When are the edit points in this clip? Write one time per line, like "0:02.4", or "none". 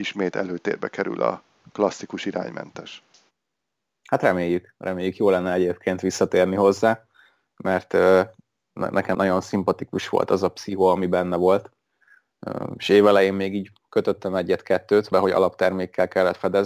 0:09.1
0:15.1

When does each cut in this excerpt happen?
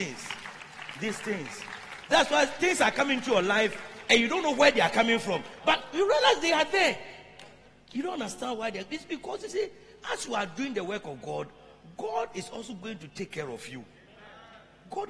none

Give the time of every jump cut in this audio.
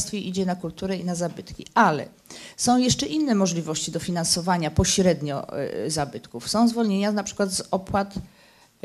none

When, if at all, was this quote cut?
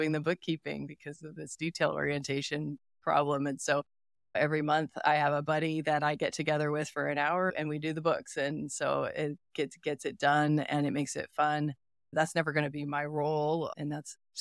none

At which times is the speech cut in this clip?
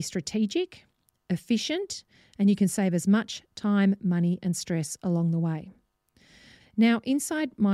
0:06.6

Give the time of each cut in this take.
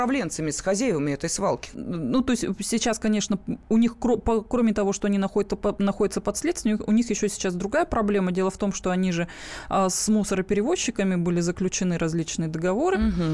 0:01.7

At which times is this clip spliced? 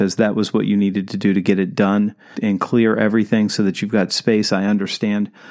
0:02.3

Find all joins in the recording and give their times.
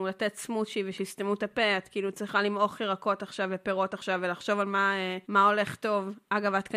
0:05.2

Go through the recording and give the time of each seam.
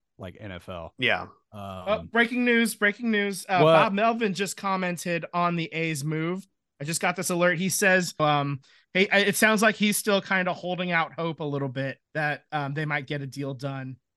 0:08.2
0:12.0

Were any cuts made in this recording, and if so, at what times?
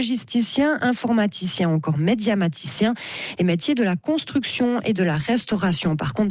none

